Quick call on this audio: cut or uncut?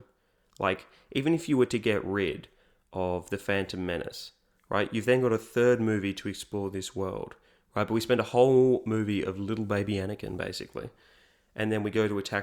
uncut